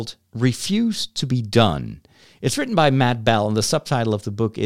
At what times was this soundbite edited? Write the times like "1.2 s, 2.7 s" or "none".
none